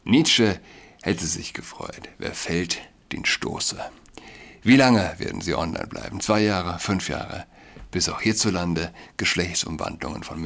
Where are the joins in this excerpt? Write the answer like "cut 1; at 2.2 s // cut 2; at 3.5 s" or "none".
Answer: none